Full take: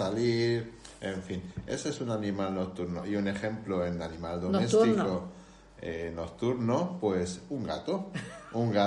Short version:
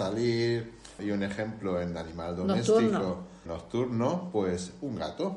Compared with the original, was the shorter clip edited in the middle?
yes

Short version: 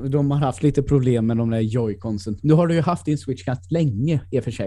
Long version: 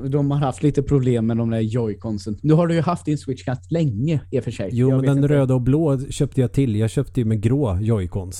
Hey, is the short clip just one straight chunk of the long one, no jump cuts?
yes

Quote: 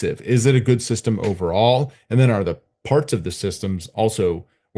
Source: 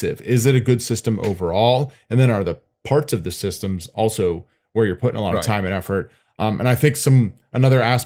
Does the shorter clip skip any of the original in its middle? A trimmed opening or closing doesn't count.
no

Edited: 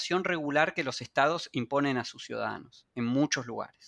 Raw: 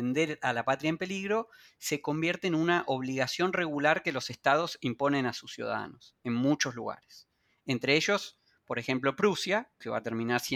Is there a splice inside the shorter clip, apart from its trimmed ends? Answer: no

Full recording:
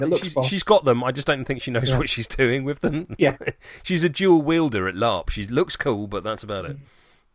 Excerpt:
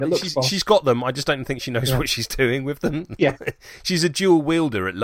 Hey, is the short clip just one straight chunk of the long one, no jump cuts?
yes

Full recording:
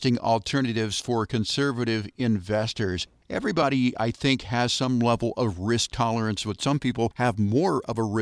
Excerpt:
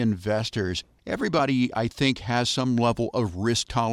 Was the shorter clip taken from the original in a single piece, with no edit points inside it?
yes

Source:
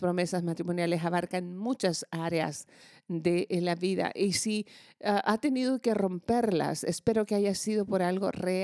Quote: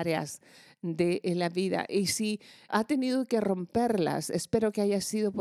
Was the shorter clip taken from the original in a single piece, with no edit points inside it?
no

